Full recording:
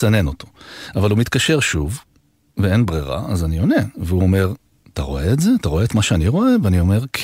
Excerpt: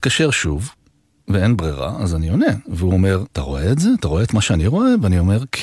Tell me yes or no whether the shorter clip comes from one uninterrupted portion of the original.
no